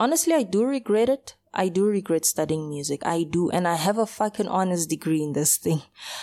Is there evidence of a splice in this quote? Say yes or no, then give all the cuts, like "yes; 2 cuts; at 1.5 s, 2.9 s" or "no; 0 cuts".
no; 0 cuts